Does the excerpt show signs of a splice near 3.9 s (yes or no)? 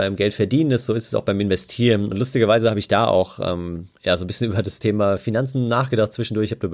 yes